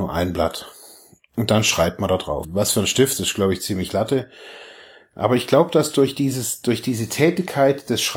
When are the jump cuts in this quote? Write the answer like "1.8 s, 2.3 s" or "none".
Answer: 2.4 s